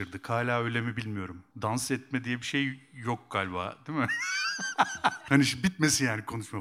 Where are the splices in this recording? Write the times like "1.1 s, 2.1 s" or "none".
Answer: 1.5 s, 5.3 s